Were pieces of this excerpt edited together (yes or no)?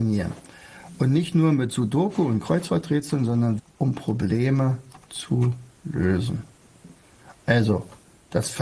yes